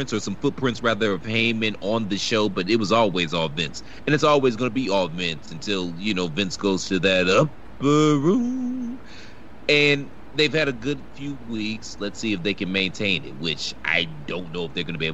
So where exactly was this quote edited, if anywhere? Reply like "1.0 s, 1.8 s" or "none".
none